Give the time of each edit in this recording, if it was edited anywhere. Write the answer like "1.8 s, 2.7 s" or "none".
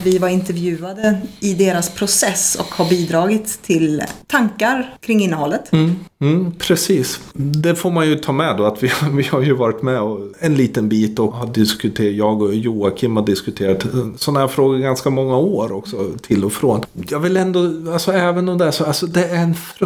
none